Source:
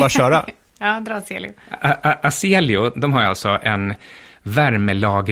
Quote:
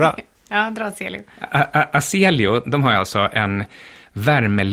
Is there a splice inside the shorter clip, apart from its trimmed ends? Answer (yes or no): no